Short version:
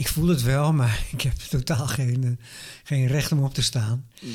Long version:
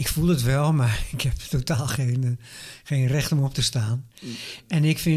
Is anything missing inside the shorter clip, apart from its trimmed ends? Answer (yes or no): no